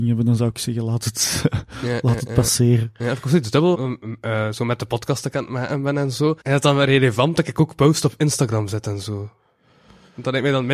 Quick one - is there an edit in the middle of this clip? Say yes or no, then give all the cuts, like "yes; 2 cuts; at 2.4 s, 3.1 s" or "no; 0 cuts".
yes; 2 cuts; at 3.7 s, 6.4 s